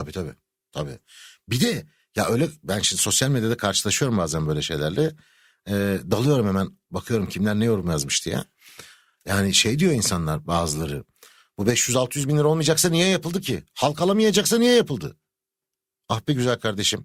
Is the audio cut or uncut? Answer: uncut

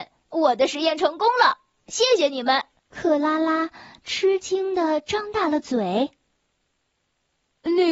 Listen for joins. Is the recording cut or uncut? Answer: uncut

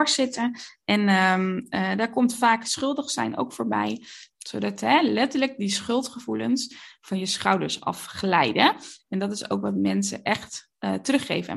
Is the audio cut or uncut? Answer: cut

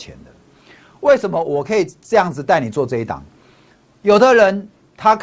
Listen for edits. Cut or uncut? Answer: uncut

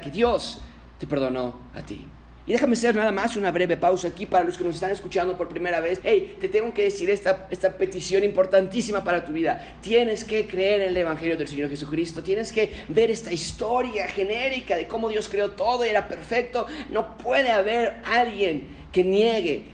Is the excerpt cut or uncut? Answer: cut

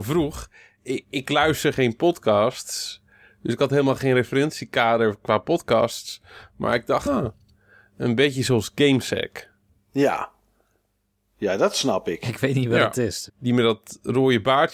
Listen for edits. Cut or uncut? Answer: cut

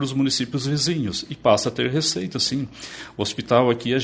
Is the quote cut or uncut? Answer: uncut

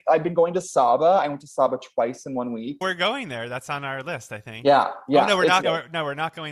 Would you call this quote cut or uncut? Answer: cut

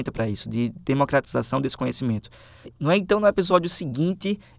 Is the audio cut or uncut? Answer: cut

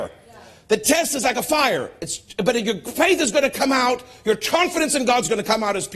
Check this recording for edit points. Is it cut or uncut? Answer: uncut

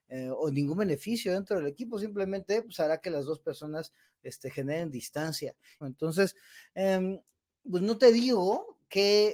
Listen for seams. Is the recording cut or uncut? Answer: cut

